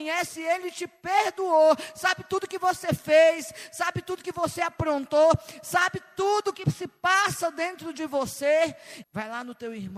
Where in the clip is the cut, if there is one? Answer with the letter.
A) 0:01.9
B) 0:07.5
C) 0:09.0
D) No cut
C